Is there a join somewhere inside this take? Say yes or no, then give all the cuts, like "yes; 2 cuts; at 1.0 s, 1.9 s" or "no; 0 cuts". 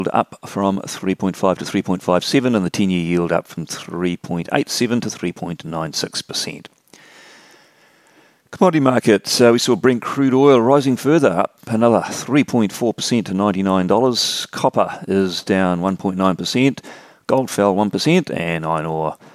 no; 0 cuts